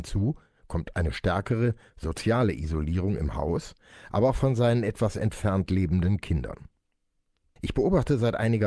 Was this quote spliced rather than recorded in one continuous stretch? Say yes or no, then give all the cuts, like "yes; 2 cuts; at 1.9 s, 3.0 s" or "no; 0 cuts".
yes; 1 cut; at 7.6 s